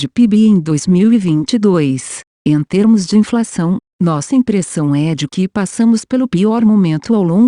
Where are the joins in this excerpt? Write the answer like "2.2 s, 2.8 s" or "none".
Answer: 2.3 s